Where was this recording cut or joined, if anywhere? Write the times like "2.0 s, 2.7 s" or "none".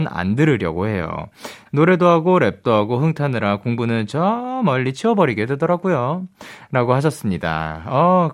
1.7 s